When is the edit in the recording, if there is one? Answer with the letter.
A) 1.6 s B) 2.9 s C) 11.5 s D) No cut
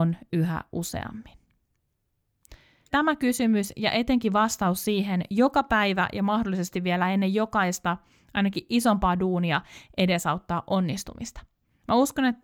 B